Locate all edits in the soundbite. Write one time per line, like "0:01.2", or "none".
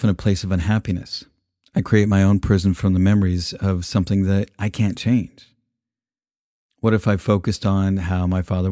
0:06.7